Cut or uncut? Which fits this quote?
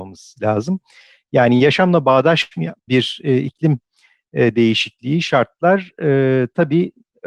uncut